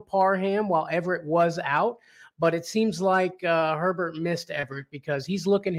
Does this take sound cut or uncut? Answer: uncut